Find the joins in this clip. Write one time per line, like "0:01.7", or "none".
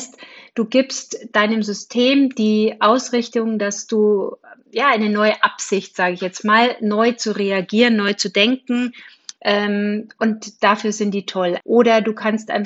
0:09.4
0:11.6